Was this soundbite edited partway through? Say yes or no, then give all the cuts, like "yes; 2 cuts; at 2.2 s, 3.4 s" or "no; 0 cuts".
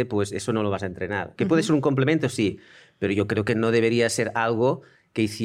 yes; 1 cut; at 1.4 s